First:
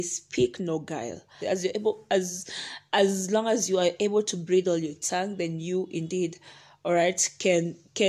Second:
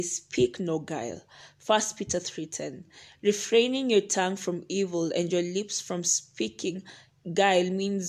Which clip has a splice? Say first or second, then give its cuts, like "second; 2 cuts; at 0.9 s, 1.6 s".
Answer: first; 1 cut; at 1.4 s